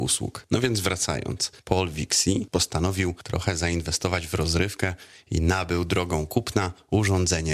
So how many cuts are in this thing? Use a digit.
0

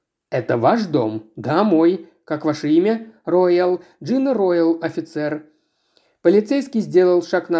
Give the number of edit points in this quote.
0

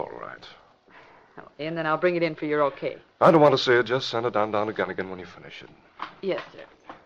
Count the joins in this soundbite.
1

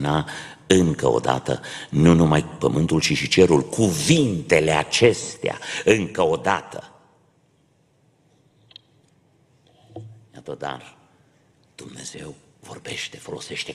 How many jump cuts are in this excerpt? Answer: 0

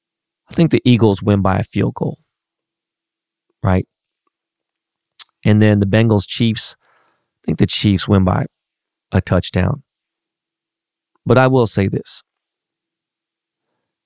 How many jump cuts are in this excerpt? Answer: 0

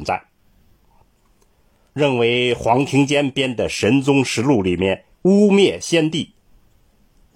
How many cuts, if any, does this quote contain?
2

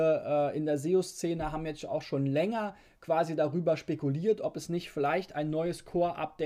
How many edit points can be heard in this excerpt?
0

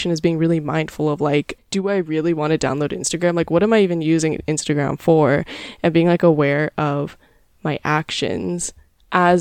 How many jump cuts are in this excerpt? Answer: 1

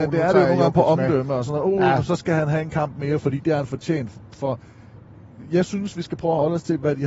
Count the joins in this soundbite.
0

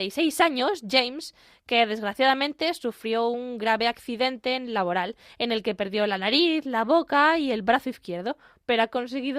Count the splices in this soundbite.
0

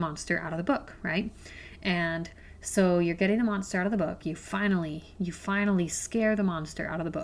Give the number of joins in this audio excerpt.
1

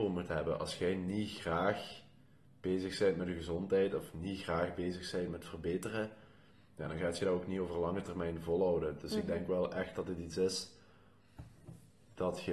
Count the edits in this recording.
0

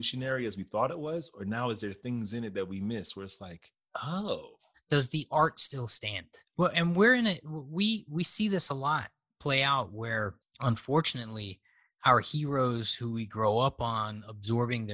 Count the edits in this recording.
0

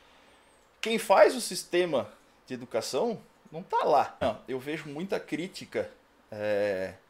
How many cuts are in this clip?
1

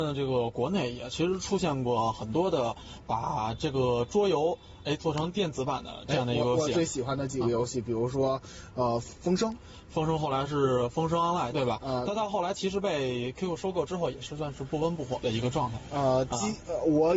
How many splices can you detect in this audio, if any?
1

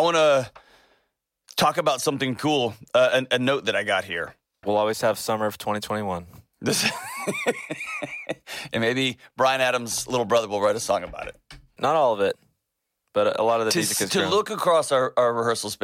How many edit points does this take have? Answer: 2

